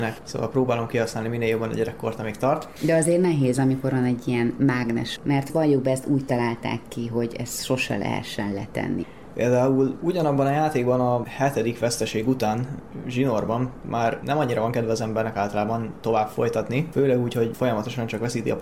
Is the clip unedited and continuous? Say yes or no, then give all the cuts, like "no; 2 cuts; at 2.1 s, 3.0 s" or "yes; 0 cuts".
no; 2 cuts; at 5.2 s, 9.3 s